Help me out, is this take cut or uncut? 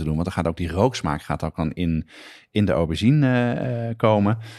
uncut